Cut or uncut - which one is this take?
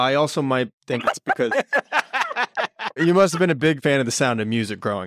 uncut